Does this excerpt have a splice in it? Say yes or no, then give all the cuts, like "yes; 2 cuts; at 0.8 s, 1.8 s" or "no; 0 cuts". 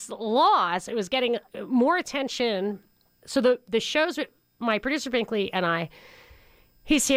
no; 0 cuts